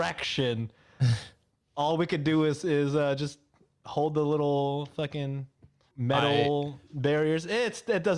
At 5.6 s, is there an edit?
no; 0 cuts

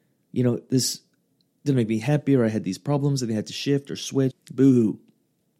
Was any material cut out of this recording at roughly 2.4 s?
no; 1 cut; at 4.3 s

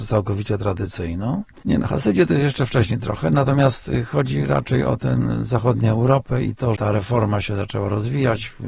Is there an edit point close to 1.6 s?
yes; 2 cuts; at 1.6 s, 6.8 s

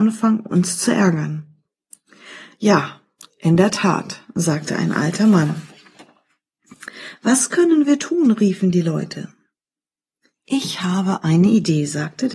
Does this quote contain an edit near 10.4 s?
no; 0 cuts

